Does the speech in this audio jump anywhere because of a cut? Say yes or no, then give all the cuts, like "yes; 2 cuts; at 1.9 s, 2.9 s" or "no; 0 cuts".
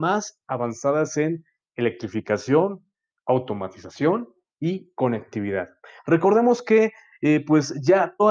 no; 0 cuts